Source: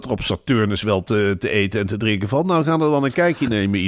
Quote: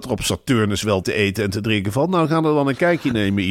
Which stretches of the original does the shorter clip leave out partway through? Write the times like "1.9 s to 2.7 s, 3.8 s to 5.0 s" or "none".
1.0 s to 1.4 s